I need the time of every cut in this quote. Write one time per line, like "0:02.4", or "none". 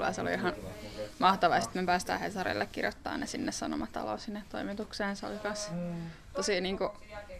none